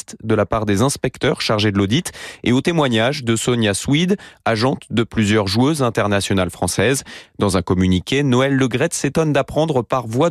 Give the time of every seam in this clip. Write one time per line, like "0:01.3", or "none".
none